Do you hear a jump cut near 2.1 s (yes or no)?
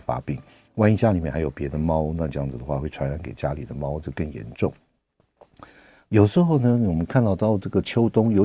no